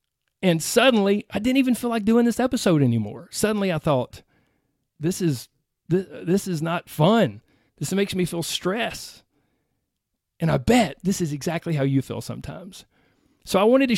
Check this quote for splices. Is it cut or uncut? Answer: cut